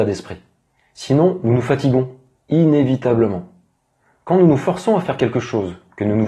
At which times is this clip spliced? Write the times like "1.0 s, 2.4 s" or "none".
none